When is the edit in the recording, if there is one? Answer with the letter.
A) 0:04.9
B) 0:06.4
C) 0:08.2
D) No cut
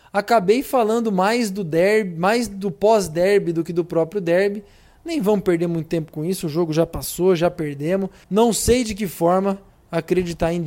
C